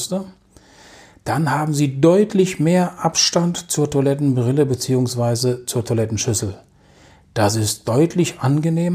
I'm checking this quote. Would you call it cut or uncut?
uncut